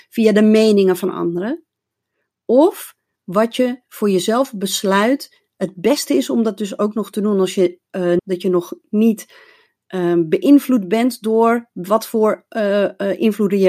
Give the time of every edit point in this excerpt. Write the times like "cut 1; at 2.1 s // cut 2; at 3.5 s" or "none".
cut 1; at 8.2 s